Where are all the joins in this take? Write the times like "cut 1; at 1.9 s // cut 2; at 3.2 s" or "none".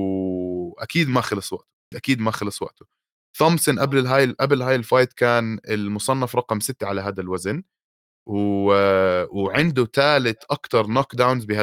cut 1; at 1.9 s